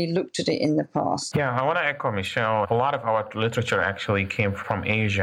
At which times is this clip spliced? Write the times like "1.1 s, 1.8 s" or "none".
1.3 s